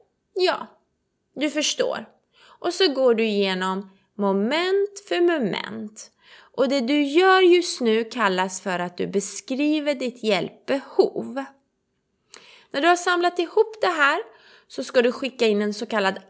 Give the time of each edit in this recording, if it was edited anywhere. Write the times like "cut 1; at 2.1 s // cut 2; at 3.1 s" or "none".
none